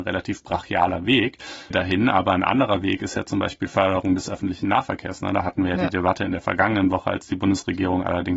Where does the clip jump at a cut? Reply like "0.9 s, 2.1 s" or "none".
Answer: 1.7 s